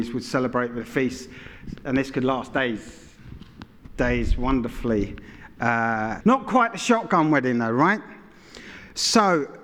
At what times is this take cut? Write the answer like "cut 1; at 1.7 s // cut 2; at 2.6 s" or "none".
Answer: cut 1; at 6.2 s